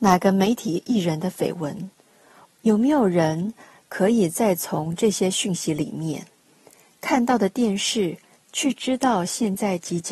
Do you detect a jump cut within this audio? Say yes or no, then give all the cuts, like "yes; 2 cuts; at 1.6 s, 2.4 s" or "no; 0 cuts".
yes; 2 cuts; at 2.4 s, 8.4 s